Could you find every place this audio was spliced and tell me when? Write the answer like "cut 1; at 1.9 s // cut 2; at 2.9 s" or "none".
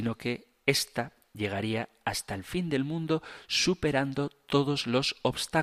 none